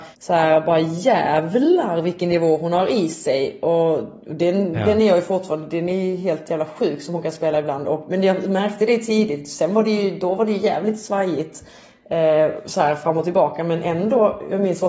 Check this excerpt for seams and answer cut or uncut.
uncut